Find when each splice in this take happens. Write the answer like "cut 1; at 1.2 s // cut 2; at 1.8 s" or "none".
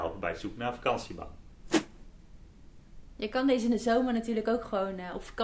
none